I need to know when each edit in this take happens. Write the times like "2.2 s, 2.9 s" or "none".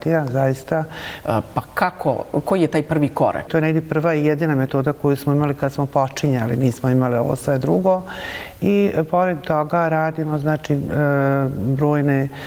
1.2 s, 3.5 s